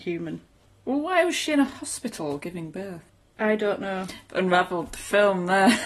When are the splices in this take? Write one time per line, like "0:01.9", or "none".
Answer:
none